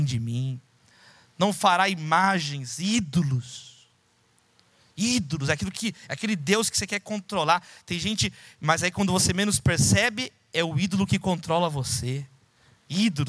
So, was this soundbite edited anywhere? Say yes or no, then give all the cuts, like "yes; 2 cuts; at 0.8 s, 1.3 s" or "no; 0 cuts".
no; 0 cuts